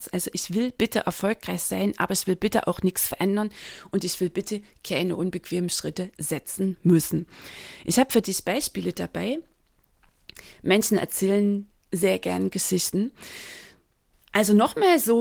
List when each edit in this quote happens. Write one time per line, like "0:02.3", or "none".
0:14.1